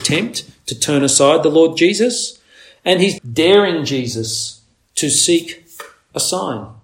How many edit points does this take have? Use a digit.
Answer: 1